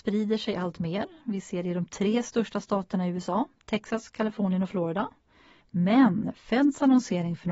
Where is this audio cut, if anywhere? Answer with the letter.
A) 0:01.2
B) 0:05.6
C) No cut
B